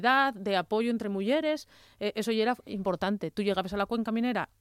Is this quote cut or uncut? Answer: uncut